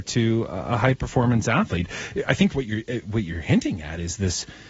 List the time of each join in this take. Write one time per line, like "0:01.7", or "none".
none